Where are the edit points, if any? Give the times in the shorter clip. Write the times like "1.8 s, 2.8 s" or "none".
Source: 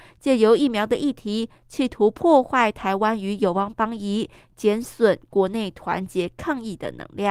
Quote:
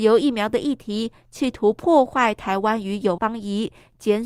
3.2 s